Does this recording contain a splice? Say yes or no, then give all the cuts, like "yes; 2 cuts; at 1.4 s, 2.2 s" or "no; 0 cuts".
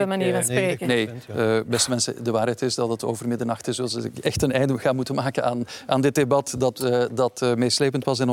no; 0 cuts